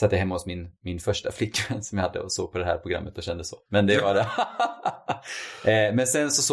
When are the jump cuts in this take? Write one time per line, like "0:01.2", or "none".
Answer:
none